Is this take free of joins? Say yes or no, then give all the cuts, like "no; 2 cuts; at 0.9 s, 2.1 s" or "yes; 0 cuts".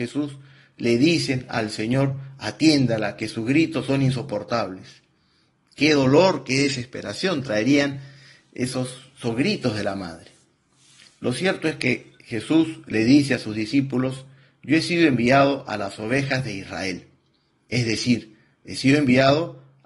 yes; 0 cuts